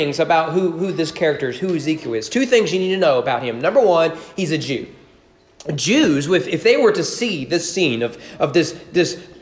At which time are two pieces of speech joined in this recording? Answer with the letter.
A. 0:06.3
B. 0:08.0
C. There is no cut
C